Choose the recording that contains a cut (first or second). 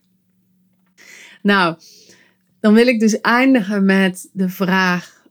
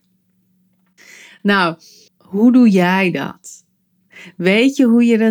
second